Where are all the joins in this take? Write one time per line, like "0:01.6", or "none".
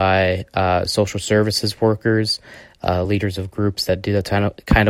none

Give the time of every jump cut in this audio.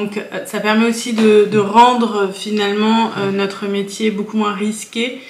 none

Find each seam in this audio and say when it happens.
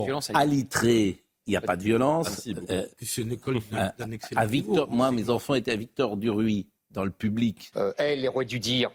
0:07.7

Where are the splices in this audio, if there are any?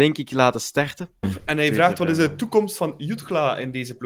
0:01.2

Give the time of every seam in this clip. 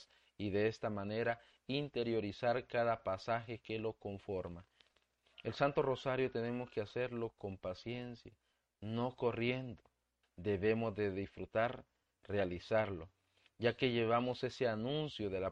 0:10.2

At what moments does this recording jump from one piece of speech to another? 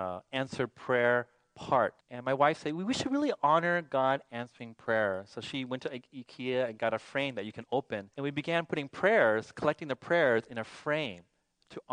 0:02.0
0:08.1

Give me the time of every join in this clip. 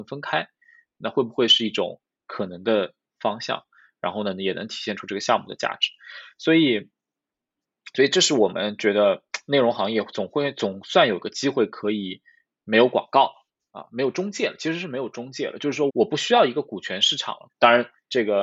0:15.9
0:17.5

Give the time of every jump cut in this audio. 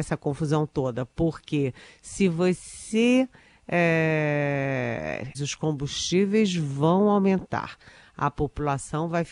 0:05.3

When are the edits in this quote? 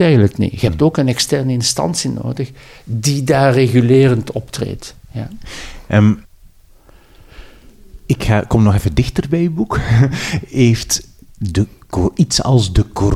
0:04.9

